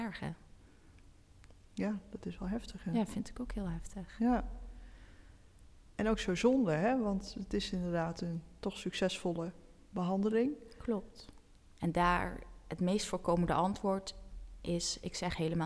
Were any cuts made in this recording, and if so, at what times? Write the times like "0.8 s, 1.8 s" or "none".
11.8 s